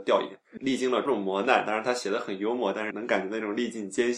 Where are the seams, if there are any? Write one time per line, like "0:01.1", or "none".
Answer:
0:01.1
0:02.9